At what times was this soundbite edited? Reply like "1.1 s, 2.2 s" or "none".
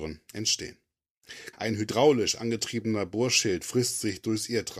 1.5 s